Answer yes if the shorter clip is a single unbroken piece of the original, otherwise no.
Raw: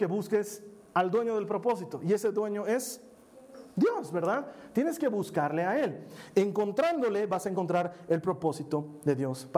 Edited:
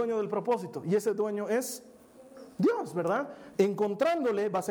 no